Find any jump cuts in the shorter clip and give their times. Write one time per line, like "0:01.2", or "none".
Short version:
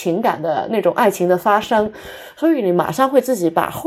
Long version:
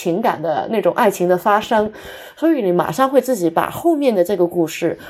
none